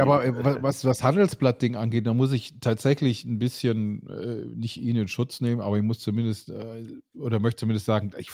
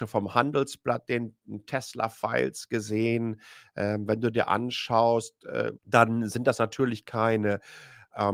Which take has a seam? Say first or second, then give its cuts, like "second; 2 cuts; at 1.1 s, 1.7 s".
second; 1 cut; at 5.8 s